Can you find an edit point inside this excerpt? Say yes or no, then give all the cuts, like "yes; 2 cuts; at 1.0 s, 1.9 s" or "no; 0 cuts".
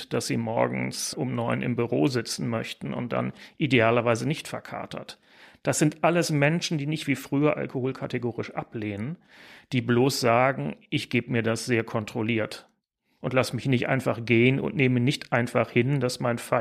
no; 0 cuts